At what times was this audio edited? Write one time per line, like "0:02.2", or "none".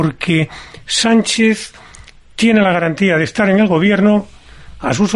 none